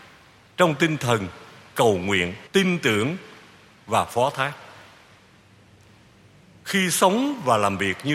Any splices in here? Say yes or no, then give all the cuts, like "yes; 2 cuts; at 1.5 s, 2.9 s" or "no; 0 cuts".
yes; 1 cut; at 2.5 s